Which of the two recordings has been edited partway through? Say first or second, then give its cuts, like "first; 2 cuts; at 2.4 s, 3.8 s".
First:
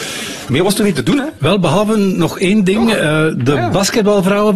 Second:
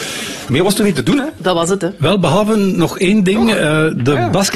first; 1 cut; at 1.4 s